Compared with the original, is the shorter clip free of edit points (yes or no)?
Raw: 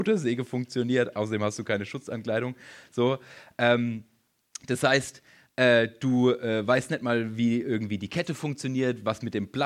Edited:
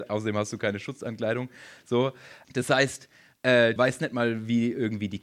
no